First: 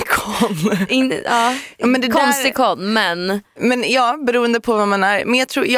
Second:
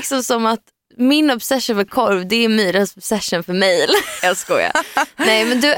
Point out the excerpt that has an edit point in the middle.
second; 1 cut; at 4.2 s

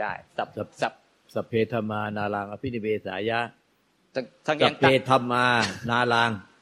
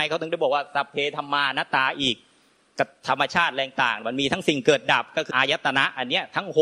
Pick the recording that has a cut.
second; 1 cut; at 5.3 s

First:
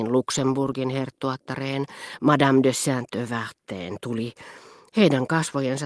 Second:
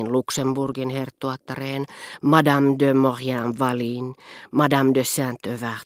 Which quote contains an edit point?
first; 1 cut; at 2.2 s

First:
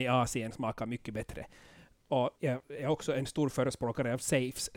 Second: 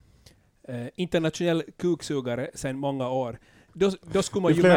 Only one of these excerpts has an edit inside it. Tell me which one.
first; 1 cut; at 2.4 s

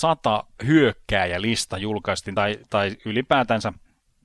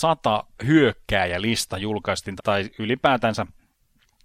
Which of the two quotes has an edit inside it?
second; 1 cut; at 2.4 s

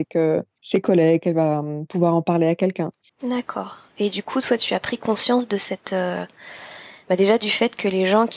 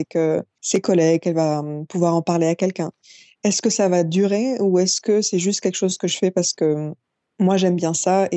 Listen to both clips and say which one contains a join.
first; 1 cut; at 3.1 s

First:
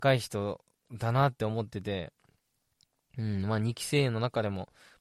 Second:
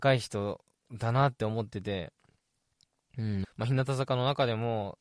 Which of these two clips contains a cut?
second; 1 cut; at 3.4 s

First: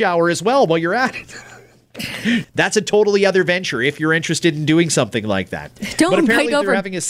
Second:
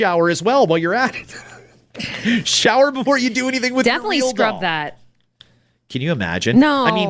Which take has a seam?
first; 1 cut; at 2.4 s

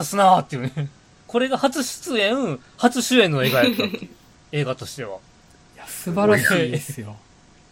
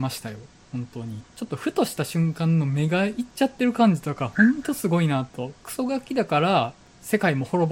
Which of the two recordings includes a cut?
second; 2 cuts; at 1.3 s, 5.6 s

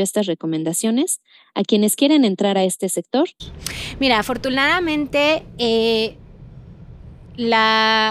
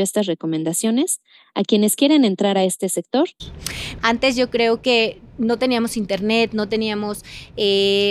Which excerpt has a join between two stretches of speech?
second; 1 cut; at 4.0 s

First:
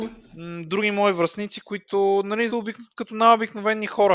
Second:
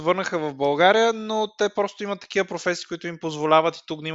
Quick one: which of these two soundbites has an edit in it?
first; 1 cut; at 2.5 s

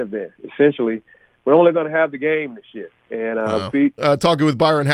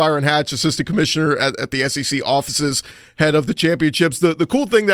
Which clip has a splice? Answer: first; 1 cut; at 4.0 s

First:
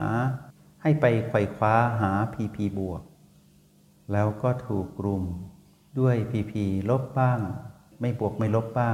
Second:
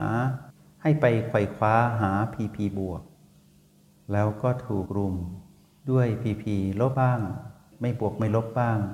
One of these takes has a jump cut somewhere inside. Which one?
second; 2 cuts; at 4.9 s, 6.9 s

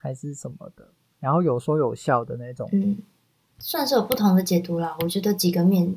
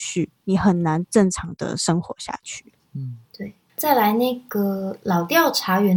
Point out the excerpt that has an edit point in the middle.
second; 1 cut; at 3.2 s

